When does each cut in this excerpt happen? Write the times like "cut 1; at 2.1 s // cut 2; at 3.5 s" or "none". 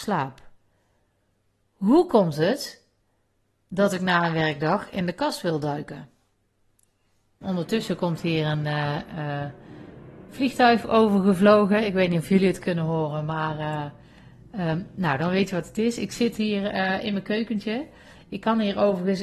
cut 1; at 7.4 s